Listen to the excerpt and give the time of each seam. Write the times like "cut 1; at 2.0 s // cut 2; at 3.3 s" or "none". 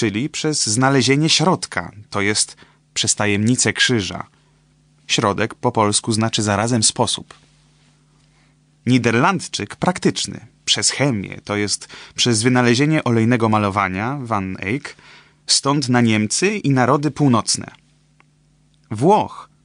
none